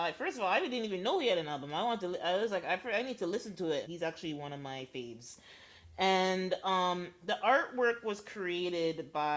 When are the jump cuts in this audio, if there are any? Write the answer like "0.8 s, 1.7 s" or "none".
3.8 s